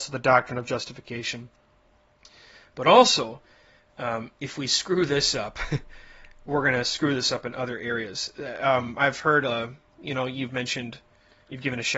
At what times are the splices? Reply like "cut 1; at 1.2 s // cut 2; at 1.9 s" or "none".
none